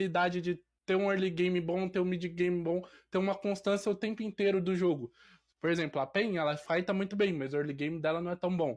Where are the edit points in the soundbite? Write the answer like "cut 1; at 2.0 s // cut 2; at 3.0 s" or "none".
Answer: none